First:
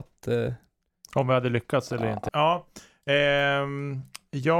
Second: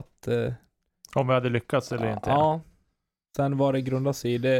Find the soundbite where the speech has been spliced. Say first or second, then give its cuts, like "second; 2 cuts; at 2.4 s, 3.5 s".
first; 1 cut; at 2.3 s